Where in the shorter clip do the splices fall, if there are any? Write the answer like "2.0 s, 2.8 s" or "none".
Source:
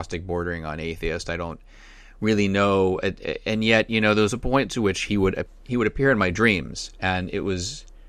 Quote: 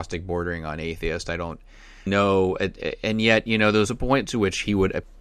2.1 s